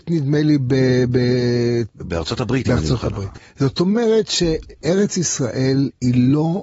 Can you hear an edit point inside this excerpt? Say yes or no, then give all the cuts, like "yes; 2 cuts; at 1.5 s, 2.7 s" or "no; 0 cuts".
no; 0 cuts